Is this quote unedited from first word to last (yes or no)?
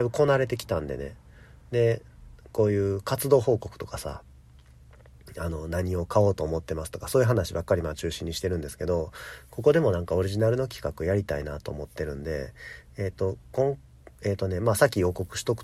yes